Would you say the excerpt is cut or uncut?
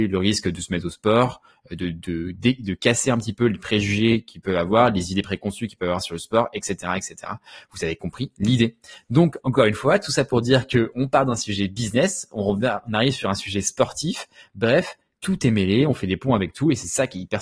uncut